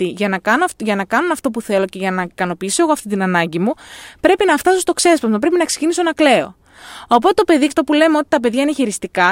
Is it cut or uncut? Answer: cut